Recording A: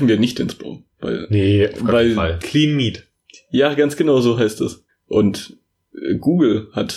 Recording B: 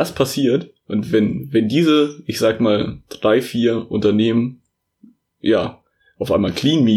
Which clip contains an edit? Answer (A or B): A